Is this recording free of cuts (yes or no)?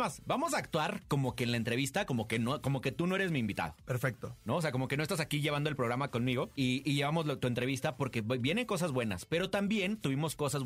yes